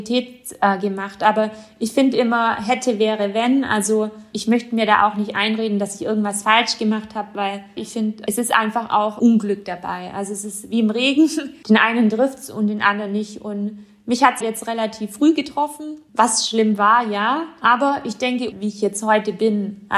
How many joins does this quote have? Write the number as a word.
two